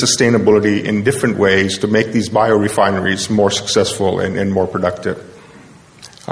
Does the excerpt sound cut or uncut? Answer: uncut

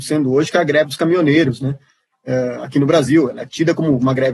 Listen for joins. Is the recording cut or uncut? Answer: uncut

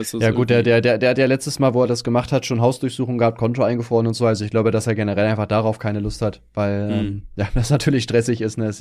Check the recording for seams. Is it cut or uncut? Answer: uncut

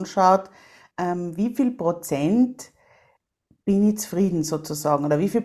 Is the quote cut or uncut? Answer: uncut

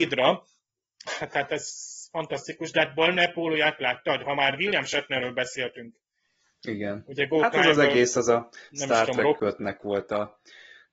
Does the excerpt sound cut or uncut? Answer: uncut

